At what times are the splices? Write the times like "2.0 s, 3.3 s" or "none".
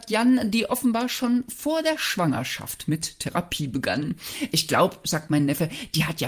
none

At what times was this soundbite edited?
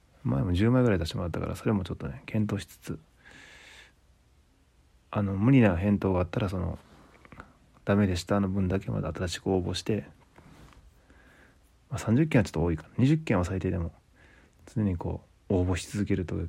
none

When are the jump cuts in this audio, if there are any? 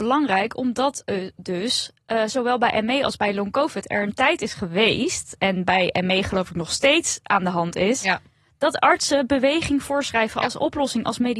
none

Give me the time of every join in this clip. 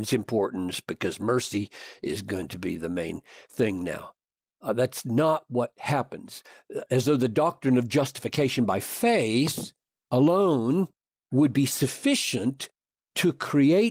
none

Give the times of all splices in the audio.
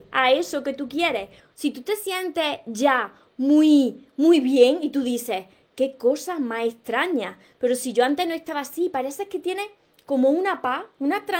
1.4 s

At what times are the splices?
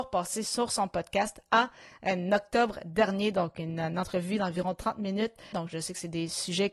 5.5 s

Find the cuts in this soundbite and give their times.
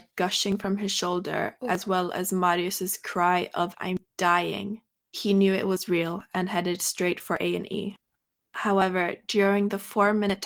3.7 s, 8.4 s

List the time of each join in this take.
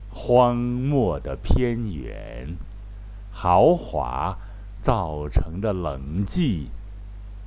none

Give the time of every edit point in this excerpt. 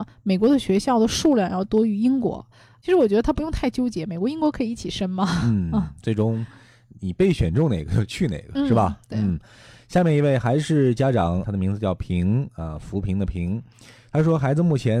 none

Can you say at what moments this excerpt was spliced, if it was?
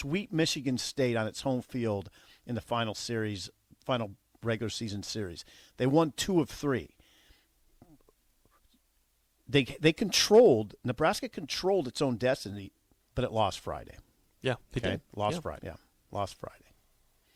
13.0 s, 15.6 s

